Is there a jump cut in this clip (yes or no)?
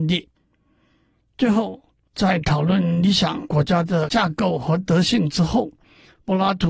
no